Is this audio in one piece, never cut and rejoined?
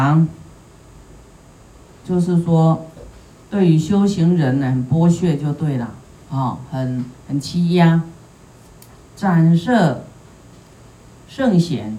no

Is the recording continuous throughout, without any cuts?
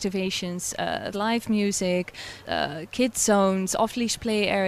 no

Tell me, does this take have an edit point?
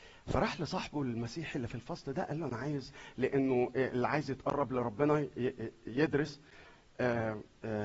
no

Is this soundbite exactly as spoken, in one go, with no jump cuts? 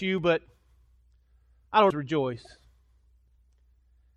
no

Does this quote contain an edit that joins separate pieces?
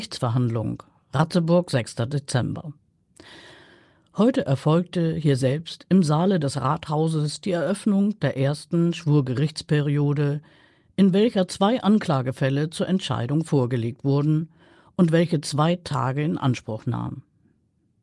no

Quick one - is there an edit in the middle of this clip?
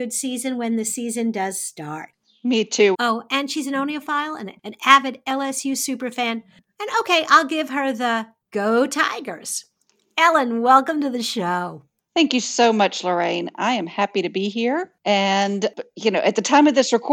yes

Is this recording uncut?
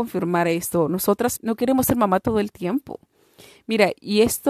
no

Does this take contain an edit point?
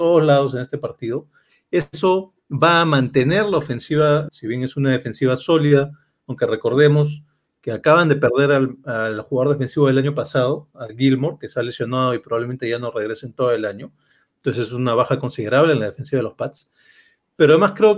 yes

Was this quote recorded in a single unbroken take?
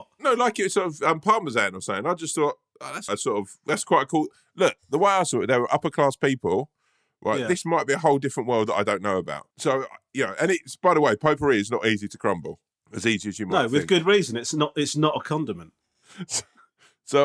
no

